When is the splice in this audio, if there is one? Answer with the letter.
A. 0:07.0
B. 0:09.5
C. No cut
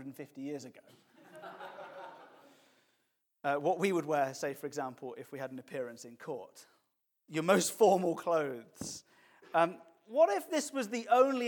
C